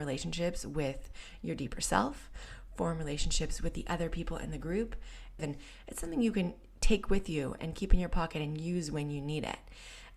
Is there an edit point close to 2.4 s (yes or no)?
no